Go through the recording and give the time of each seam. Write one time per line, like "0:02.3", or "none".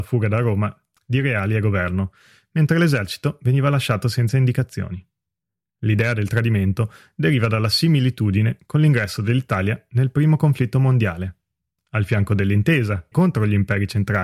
0:13.1